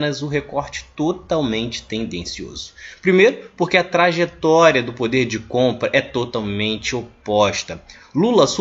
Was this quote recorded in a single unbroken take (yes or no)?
yes